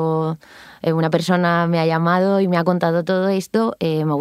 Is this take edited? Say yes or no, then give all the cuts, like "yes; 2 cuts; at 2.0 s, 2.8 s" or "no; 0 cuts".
no; 0 cuts